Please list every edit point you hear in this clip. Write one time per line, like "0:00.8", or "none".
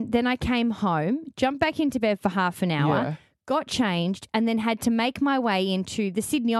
none